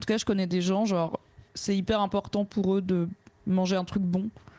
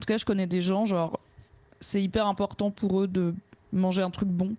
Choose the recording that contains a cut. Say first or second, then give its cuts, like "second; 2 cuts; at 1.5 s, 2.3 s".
first; 1 cut; at 1.5 s